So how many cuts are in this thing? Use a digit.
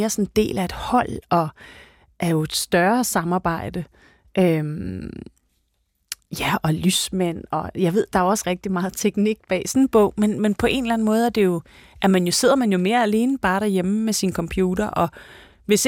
1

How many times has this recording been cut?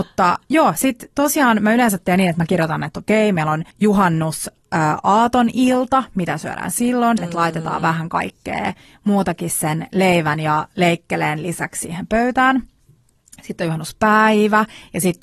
2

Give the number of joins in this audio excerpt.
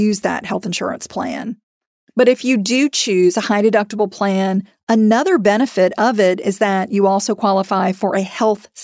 0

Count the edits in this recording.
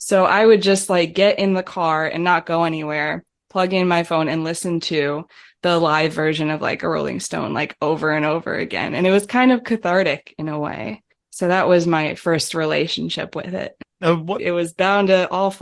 1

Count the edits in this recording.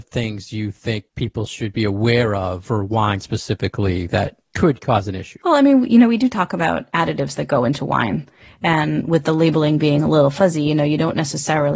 0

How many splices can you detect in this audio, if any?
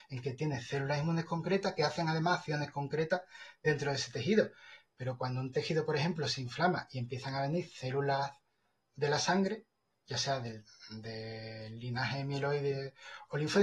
0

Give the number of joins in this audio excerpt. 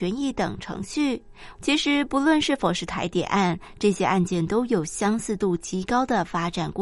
1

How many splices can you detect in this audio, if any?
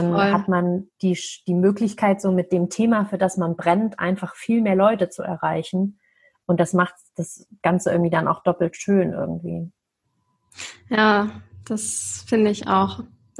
0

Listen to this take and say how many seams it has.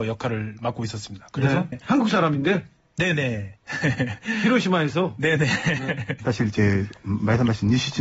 2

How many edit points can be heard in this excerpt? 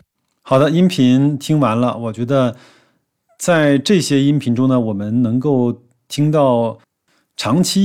0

